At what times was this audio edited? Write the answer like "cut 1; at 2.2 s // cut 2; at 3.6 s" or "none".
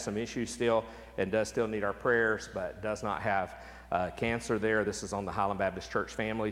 none